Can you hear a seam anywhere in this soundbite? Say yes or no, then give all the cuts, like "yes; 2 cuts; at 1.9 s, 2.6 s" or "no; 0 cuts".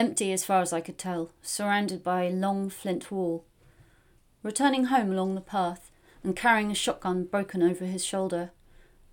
yes; 1 cut; at 6.1 s